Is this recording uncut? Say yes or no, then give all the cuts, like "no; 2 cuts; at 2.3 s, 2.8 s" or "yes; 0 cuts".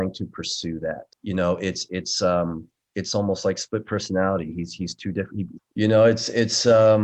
no; 2 cuts; at 1.1 s, 5.6 s